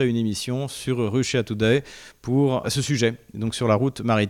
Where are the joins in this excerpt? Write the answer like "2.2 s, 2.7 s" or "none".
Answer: 2.6 s